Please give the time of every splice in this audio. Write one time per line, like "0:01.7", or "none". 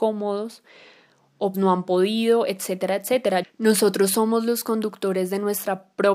0:01.5
0:03.4

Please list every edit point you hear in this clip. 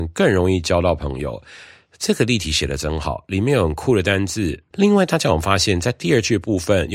0:04.7

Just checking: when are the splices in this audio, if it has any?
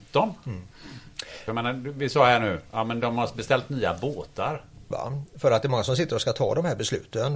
0:01.5
0:04.9

